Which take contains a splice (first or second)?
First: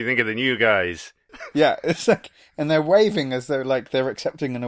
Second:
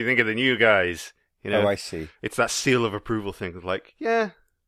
first